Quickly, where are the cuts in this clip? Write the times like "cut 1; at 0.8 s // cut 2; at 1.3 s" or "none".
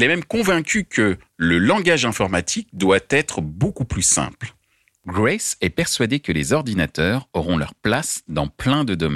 none